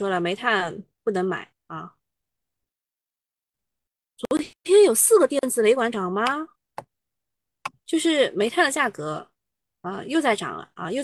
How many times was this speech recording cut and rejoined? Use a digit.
1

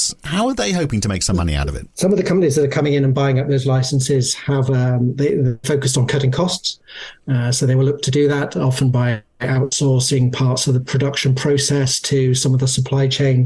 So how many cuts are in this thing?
1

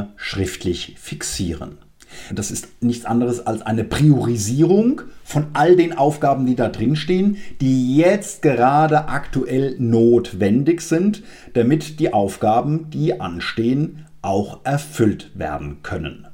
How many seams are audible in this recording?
1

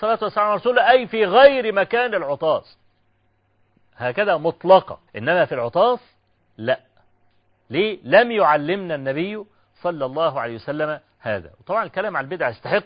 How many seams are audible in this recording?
1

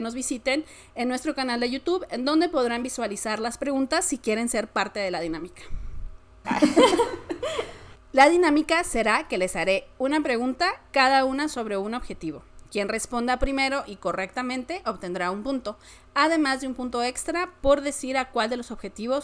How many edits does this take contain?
1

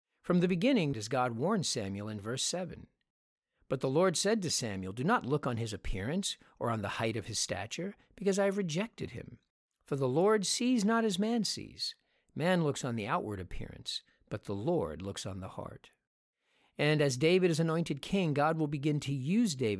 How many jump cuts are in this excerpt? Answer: 1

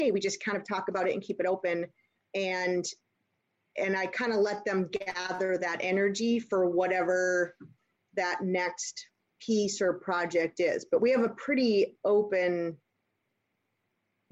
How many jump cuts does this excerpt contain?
1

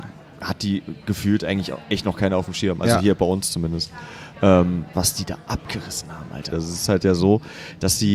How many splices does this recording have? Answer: 2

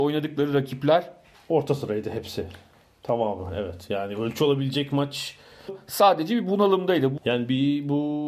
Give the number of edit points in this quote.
2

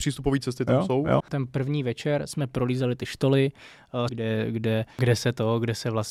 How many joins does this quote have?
2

